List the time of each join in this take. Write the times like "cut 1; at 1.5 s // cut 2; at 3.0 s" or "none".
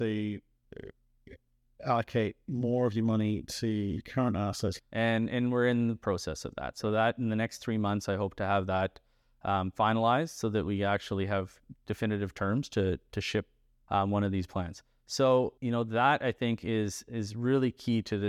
cut 1; at 4.8 s // cut 2; at 13.9 s // cut 3; at 15.6 s